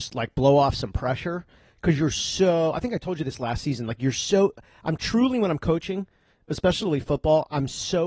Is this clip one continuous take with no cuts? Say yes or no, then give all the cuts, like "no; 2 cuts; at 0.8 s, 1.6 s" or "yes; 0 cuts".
yes; 0 cuts